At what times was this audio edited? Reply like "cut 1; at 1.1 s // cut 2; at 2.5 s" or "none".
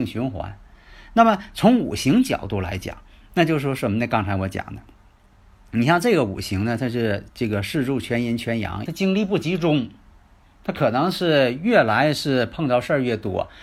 cut 1; at 8.9 s